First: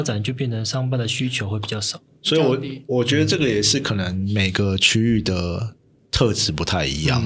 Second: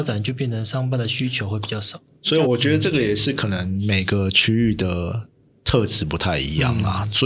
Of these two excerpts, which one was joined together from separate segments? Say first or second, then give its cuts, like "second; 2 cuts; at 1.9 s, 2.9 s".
second; 1 cut; at 2.4 s